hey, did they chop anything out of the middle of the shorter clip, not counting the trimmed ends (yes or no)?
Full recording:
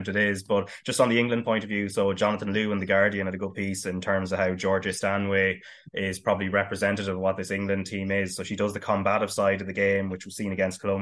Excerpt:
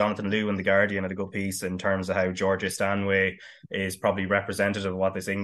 no